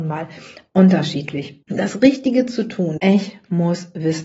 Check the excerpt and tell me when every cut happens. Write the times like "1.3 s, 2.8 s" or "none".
1.6 s, 3.0 s